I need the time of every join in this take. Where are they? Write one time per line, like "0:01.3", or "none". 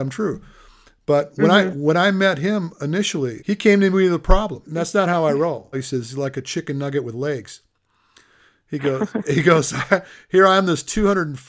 0:03.4
0:04.6
0:05.7